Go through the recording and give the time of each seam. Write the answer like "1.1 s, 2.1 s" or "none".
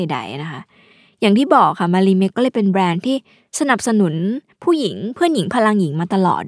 2.3 s

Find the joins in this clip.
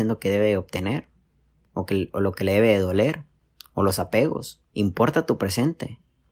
4.7 s

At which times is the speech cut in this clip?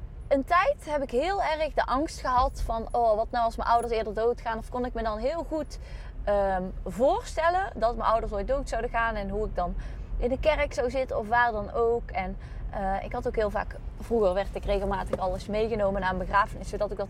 none

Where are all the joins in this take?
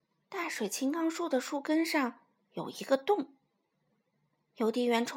none

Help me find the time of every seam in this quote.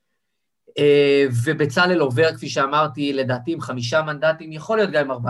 none

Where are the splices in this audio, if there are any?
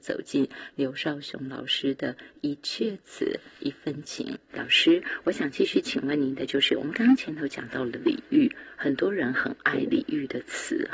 4.5 s

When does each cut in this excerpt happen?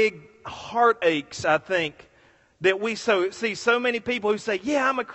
none

